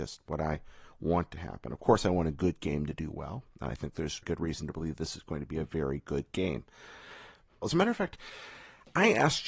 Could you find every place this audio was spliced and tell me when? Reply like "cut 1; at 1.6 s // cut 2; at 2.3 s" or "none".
cut 1; at 4.2 s // cut 2; at 7.6 s